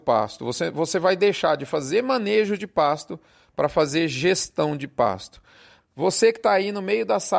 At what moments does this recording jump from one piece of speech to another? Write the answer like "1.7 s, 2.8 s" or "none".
5.8 s